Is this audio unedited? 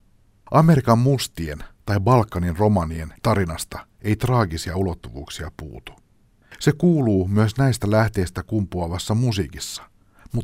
yes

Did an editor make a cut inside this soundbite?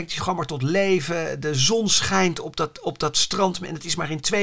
no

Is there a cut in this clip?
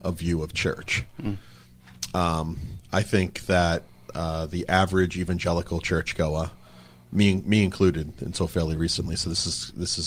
no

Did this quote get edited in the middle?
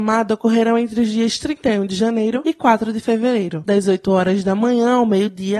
yes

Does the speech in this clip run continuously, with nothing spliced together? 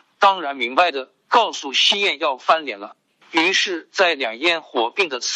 yes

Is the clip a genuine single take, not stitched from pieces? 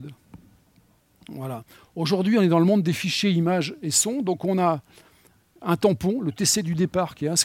yes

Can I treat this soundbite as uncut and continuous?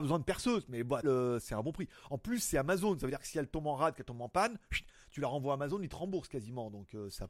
no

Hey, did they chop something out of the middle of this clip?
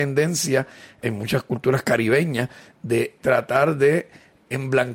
no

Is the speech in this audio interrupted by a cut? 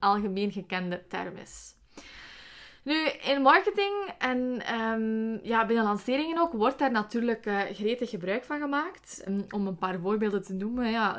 yes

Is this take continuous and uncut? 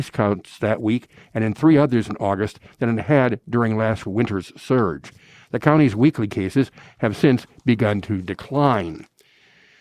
yes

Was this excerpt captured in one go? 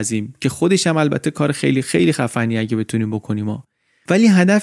yes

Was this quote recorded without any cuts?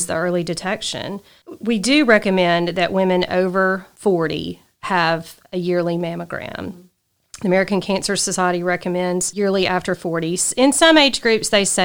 yes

